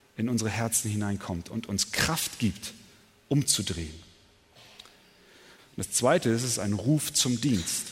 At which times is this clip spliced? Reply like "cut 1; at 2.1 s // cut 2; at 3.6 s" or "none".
cut 1; at 5.6 s